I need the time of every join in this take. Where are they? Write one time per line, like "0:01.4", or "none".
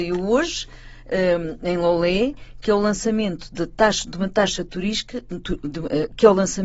none